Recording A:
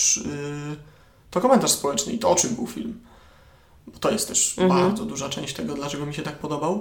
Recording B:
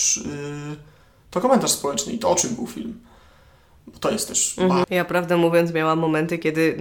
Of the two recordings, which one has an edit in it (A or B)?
B